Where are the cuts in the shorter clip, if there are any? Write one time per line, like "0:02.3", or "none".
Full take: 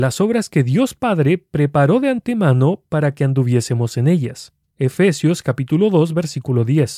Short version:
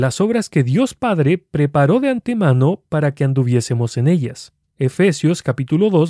none